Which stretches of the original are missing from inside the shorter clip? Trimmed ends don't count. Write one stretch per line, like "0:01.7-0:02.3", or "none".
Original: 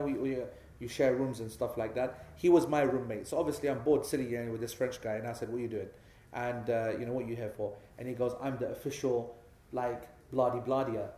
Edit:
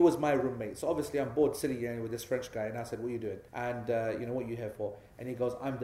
0:06.0-0:06.3